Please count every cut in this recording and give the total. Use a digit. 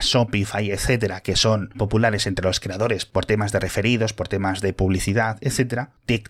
1